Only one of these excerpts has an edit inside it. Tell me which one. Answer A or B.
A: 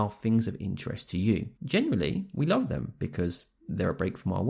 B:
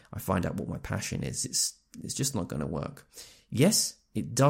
A